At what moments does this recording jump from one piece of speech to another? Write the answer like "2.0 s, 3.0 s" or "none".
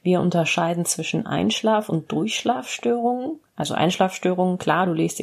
3.5 s